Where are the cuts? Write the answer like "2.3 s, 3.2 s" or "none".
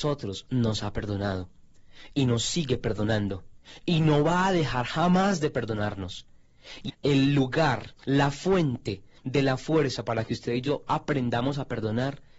6.9 s, 8.0 s